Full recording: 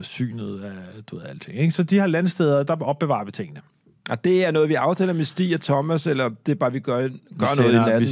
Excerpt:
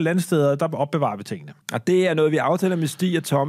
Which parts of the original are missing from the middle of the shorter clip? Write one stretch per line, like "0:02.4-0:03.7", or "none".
0:03.7-0:04.0